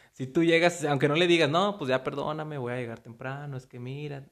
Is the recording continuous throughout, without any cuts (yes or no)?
yes